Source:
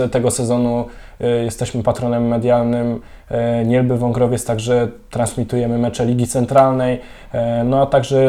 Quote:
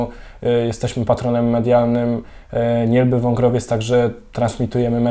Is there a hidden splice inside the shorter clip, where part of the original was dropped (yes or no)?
no